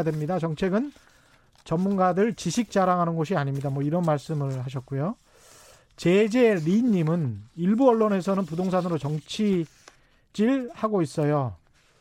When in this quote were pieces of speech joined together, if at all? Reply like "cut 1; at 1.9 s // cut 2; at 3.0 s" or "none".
none